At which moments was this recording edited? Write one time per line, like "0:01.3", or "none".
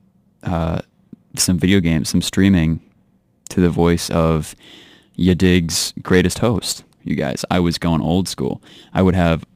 0:07.0